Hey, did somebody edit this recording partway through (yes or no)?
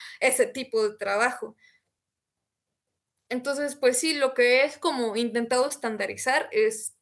no